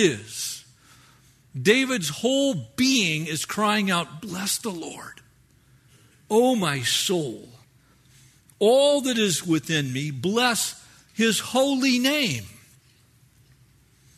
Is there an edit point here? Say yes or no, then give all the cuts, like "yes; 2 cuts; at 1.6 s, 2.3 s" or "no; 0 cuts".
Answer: no; 0 cuts